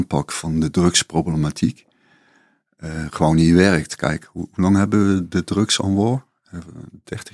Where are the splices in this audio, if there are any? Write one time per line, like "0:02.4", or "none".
none